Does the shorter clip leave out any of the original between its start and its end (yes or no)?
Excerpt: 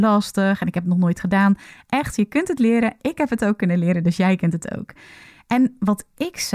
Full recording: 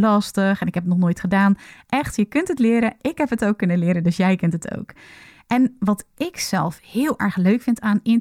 no